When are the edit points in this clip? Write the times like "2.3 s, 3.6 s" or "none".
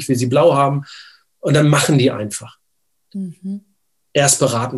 none